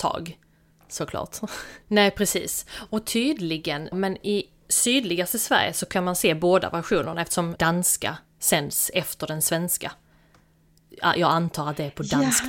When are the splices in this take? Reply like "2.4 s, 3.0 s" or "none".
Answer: 1.8 s, 3.9 s, 7.6 s